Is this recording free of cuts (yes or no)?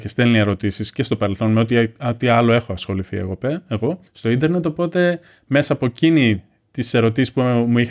no